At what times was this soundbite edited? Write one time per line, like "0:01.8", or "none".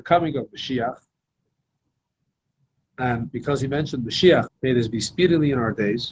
0:04.5